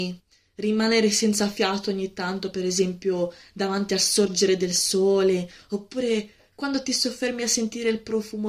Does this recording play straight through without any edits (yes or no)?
yes